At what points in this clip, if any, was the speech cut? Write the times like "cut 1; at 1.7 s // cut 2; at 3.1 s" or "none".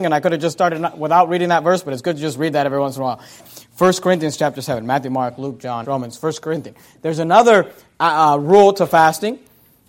cut 1; at 3.4 s // cut 2; at 5.8 s